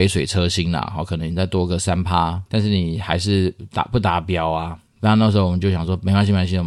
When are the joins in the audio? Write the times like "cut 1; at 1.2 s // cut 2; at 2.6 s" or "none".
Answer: cut 1; at 2.5 s